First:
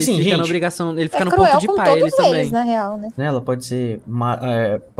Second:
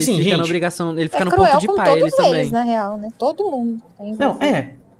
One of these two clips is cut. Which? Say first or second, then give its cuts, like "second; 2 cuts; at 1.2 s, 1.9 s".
first; 1 cut; at 3.2 s